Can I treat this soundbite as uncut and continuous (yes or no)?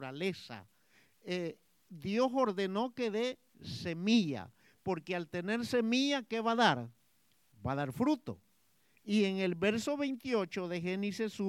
yes